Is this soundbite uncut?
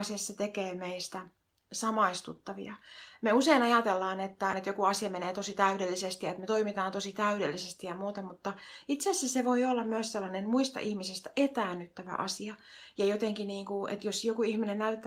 no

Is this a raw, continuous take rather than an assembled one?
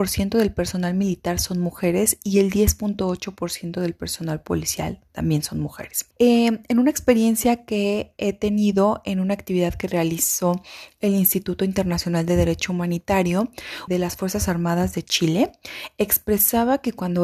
no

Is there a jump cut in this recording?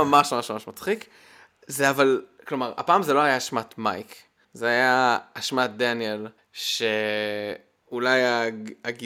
no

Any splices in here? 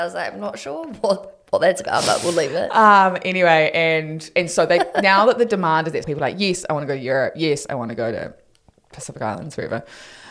yes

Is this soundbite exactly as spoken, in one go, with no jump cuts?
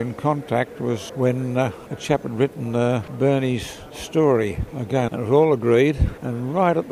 no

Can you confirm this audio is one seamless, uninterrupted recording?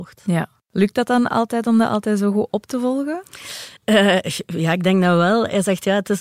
no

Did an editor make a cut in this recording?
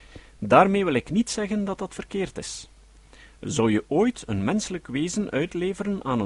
no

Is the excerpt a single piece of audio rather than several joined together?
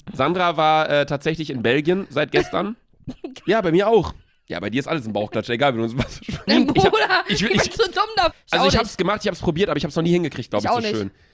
no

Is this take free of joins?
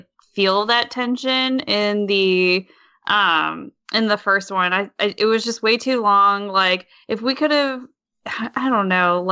yes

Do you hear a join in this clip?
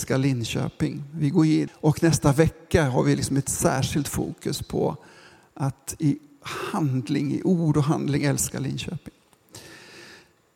yes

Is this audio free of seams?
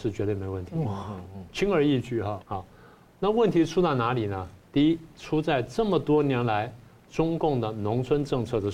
no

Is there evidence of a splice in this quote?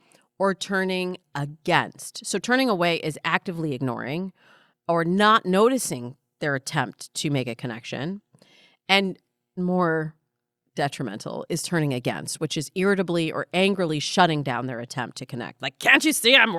yes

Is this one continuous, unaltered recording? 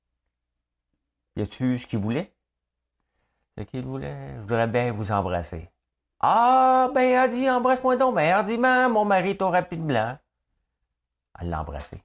yes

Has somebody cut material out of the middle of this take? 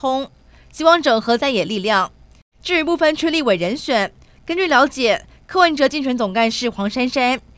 no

